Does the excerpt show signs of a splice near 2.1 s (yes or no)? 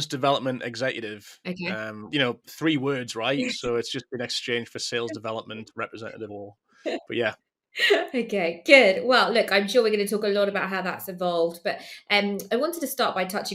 yes